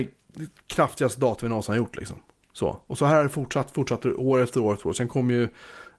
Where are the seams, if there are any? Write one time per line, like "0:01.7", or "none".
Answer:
none